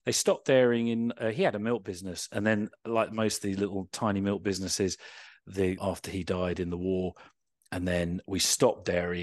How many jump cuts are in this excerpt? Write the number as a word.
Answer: one